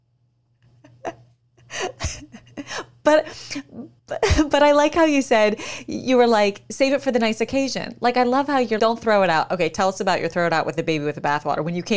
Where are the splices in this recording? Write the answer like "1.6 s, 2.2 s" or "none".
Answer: 4.0 s, 8.8 s